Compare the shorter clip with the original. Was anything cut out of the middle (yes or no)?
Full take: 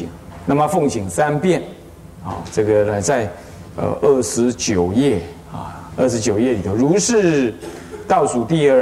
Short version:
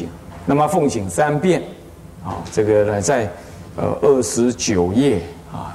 no